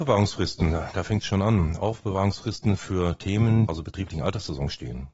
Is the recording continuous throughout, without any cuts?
no; 1 cut; at 3.7 s

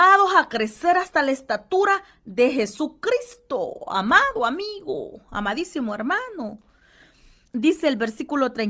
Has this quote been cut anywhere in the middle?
yes; 1 cut; at 7.5 s

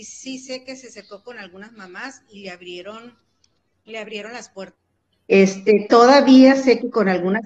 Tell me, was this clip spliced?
yes; 1 cut; at 5.1 s

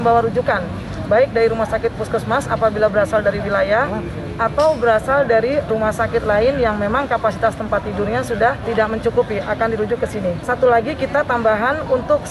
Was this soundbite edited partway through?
no; 0 cuts

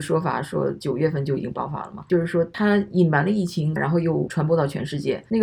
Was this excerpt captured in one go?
no; 1 cut; at 3.8 s

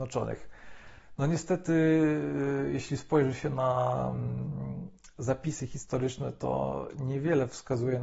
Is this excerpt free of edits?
yes; 0 cuts

